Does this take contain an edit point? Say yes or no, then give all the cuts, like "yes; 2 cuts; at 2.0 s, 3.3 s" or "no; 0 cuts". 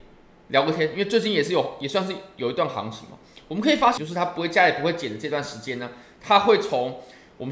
yes; 1 cut; at 4.0 s